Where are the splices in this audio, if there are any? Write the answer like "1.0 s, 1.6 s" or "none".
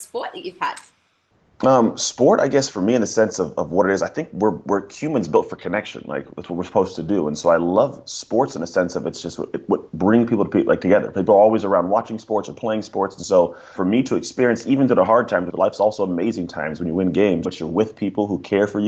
13.8 s, 15.5 s, 17.4 s